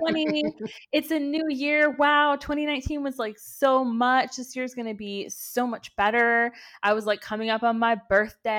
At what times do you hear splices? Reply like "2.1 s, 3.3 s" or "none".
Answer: none

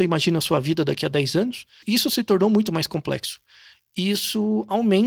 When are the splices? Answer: none

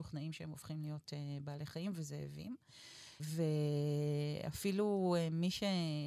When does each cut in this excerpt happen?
3.2 s

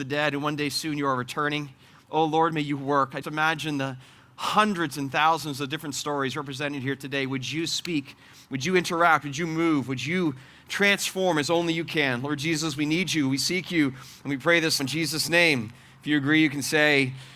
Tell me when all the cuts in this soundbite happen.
3.2 s, 14.8 s

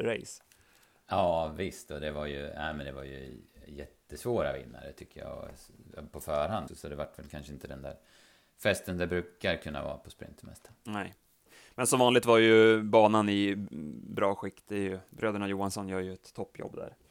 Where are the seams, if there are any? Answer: 6.7 s

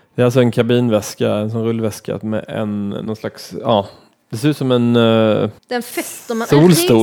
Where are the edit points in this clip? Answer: 5.6 s

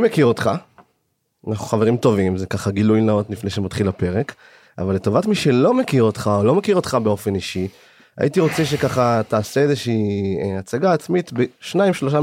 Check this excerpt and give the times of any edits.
none

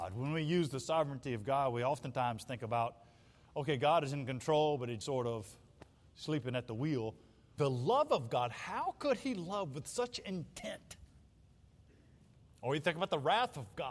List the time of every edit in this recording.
5.0 s, 7.6 s

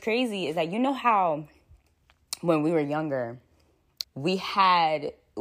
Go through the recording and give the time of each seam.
4.0 s

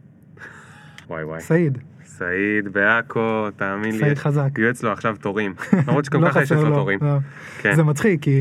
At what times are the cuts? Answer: 1.0 s

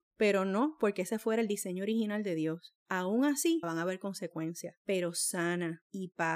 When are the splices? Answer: 3.6 s, 4.8 s

